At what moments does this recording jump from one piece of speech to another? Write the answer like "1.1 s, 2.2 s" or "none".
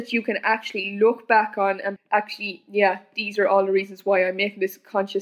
2.0 s